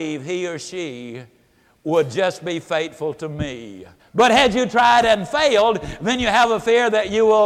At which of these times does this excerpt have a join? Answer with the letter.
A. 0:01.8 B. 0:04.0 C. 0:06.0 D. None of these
B